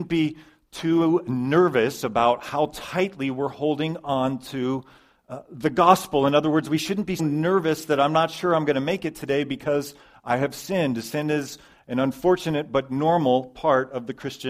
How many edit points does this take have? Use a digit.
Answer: 1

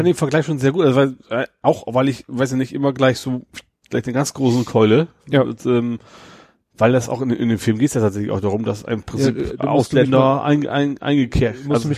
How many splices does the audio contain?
0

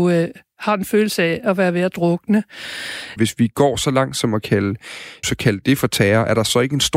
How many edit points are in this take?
2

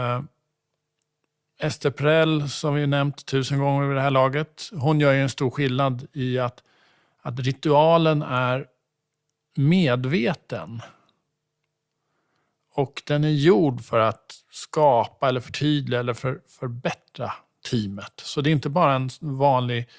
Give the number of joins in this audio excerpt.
0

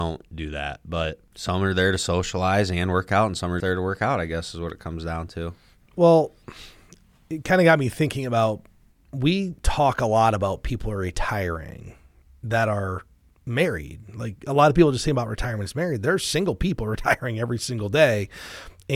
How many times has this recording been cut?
1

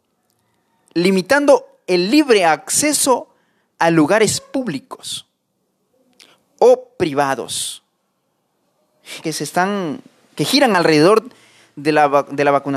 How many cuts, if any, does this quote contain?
1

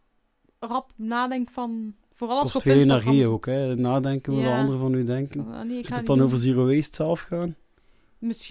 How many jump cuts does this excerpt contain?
0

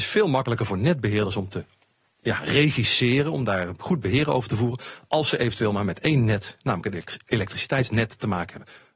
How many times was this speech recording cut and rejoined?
0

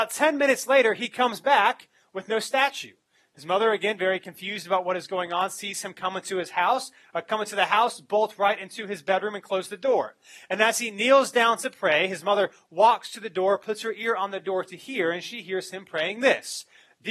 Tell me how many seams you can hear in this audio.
0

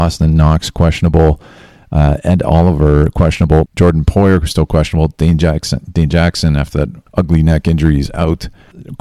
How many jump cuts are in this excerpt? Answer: 1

